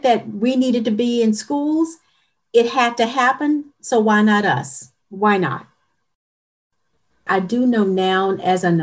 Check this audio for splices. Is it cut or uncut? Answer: cut